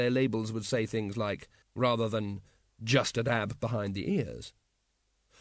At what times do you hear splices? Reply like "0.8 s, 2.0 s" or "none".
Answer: 1.6 s